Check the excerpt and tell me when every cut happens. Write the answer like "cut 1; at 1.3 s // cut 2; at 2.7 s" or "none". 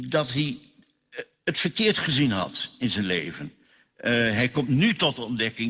none

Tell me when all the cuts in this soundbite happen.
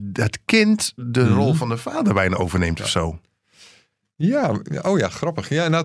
none

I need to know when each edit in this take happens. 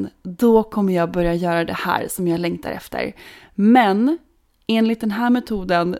none

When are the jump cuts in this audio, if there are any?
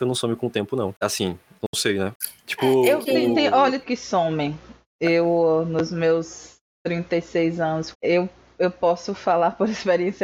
cut 1; at 3.8 s // cut 2; at 7.9 s

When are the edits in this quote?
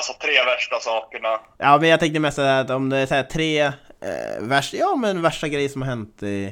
none

